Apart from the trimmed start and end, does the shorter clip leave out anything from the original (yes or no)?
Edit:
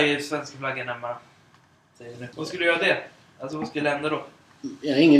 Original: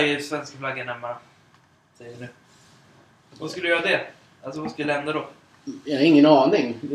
yes